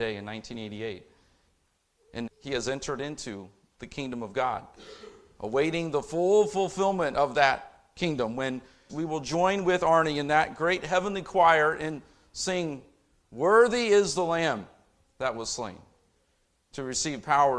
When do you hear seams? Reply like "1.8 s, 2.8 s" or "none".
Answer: 2.3 s, 8.9 s